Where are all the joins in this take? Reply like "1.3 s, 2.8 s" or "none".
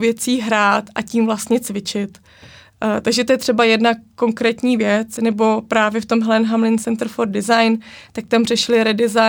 none